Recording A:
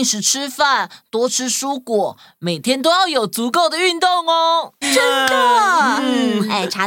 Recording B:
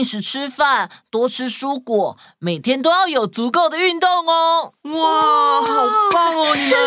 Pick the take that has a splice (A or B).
A